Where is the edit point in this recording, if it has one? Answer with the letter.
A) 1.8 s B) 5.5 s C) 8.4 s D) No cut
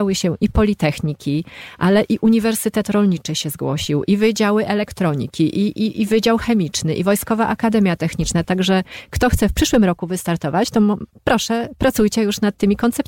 C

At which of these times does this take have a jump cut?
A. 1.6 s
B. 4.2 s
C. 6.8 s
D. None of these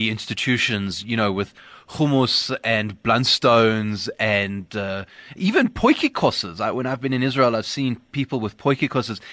D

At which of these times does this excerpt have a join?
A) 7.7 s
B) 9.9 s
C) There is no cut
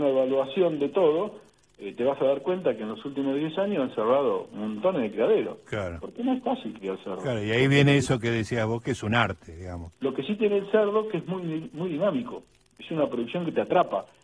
B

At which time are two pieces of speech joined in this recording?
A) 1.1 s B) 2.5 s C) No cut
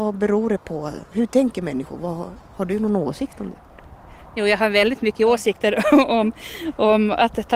A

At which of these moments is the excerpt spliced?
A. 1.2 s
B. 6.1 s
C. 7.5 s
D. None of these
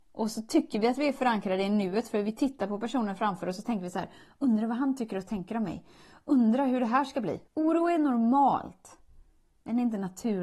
C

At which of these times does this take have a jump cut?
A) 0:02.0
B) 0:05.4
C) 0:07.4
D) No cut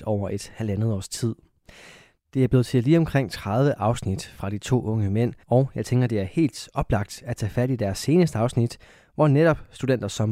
B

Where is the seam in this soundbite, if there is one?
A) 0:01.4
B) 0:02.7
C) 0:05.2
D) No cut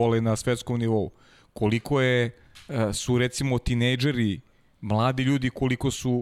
D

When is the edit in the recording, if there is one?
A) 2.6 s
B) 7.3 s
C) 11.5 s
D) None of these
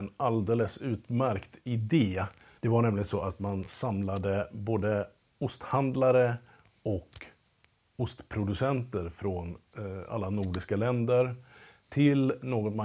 A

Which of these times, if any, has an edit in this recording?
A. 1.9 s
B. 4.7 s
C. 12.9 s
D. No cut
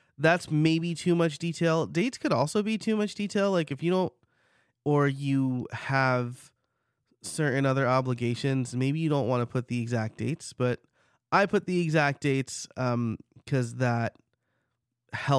B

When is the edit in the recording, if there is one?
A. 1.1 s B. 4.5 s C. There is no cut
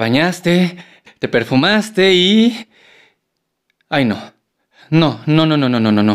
A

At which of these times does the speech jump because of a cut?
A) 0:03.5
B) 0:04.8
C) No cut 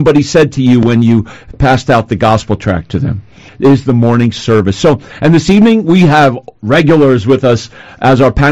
A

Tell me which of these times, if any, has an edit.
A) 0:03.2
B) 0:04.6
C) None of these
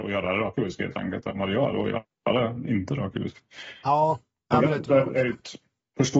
C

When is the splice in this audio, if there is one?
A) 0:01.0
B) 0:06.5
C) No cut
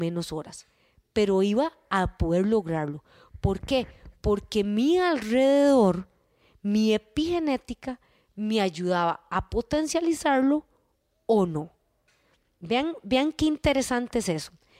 C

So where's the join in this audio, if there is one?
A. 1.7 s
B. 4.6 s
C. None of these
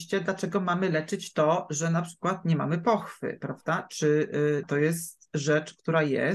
B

